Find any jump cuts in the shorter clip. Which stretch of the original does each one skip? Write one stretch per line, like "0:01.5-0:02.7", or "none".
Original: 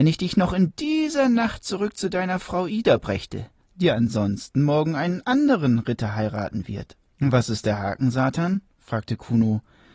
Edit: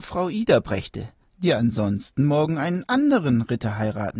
none